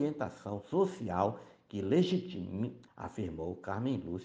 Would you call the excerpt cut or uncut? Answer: cut